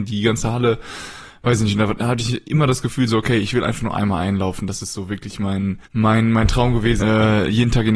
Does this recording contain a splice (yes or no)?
yes